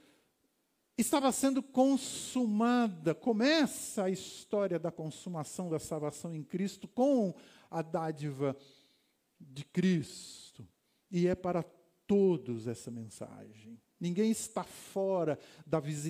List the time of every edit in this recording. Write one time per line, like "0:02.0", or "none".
none